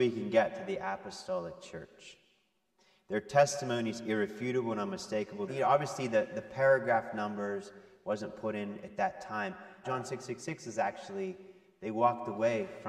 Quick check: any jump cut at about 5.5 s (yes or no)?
yes